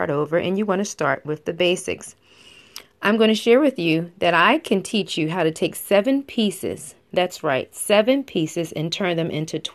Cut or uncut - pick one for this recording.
uncut